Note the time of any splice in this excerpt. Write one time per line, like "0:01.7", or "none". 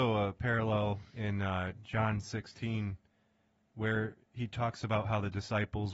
0:04.3